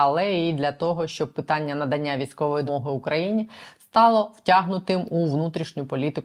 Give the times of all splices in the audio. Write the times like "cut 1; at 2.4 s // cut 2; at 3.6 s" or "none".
cut 1; at 2.7 s